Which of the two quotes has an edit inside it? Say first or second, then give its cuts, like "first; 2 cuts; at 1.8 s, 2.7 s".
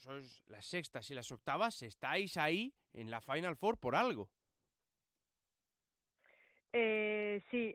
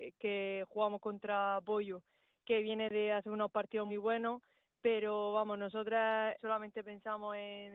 second; 2 cuts; at 3.9 s, 6.4 s